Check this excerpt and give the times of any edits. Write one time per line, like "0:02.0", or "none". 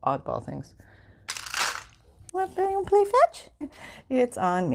0:02.3
0:03.6